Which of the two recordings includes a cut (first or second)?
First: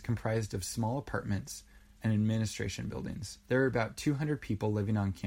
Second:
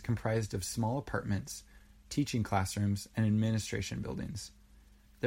first